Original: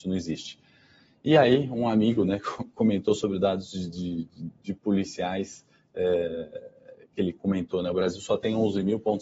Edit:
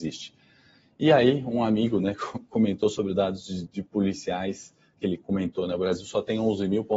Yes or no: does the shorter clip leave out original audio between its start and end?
yes